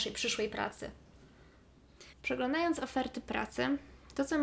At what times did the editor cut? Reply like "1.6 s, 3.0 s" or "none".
2.1 s